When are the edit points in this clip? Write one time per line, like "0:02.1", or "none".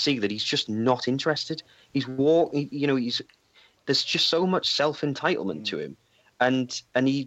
none